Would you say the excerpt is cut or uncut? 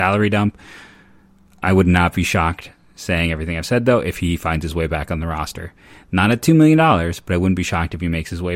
uncut